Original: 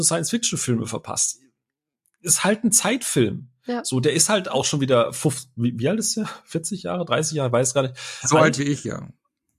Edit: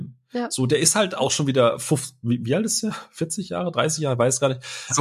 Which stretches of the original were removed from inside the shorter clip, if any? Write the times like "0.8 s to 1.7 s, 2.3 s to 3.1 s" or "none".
none